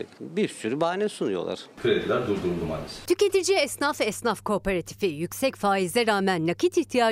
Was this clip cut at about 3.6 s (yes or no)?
no